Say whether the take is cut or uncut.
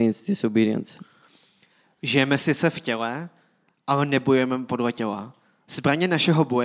uncut